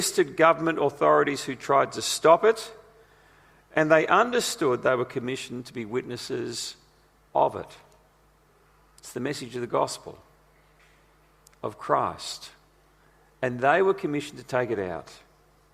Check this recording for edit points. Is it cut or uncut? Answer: uncut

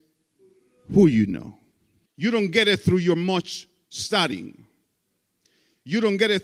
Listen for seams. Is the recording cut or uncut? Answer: cut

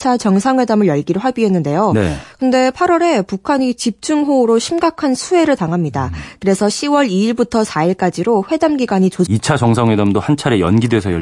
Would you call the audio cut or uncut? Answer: cut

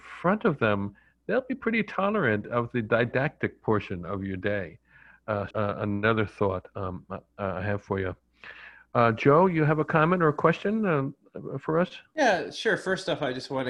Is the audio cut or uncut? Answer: cut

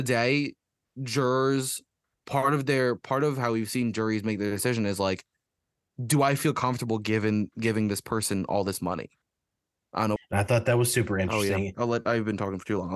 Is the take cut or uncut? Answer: cut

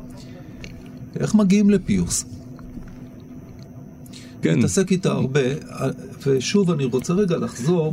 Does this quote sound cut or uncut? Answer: cut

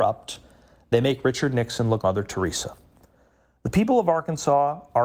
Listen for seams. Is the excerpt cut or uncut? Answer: cut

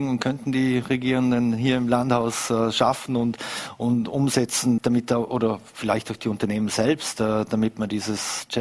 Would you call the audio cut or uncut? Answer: cut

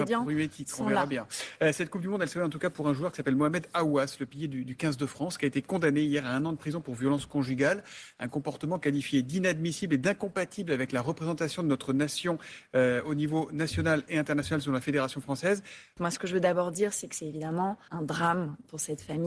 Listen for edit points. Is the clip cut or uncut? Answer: cut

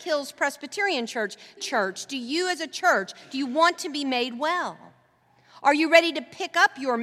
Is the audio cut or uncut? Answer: cut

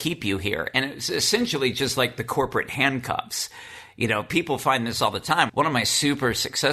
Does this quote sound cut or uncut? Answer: cut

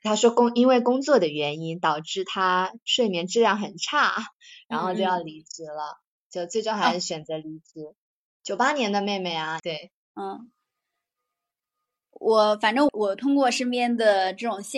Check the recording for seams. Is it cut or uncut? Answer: cut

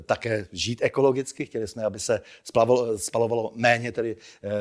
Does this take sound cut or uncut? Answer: uncut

